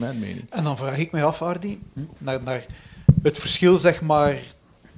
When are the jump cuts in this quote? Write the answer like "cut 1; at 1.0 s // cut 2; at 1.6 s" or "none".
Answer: cut 1; at 2.2 s